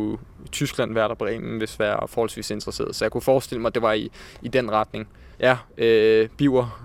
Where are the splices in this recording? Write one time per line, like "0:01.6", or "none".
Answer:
0:05.3

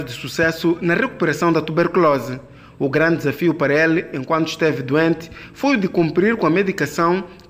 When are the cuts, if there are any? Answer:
none

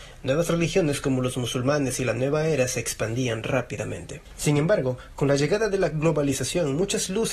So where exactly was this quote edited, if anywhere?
none

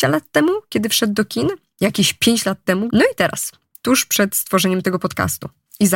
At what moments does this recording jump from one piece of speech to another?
0:02.9

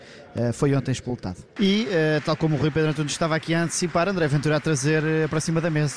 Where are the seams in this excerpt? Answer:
0:01.6

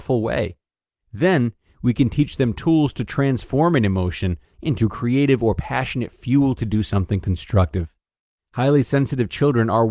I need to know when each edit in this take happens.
0:04.5
0:08.4

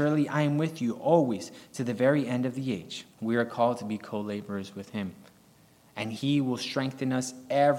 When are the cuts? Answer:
0:03.1

